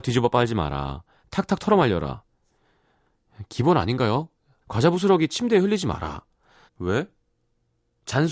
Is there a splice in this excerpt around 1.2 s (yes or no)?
no